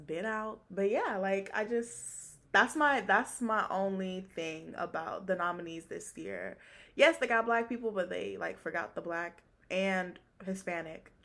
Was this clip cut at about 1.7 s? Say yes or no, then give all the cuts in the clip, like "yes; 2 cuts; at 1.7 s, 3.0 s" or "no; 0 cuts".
no; 0 cuts